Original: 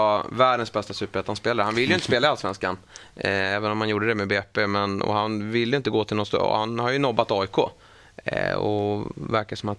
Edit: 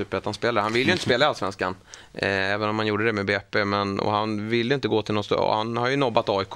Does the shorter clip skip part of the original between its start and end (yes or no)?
no